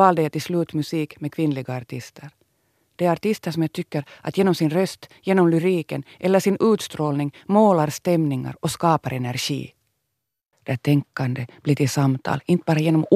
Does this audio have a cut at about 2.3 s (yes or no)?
no